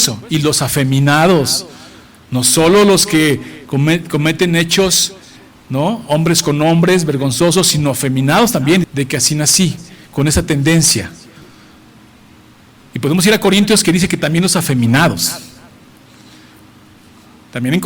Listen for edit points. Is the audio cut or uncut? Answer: cut